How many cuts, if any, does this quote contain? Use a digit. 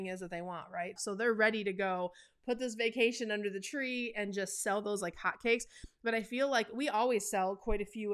1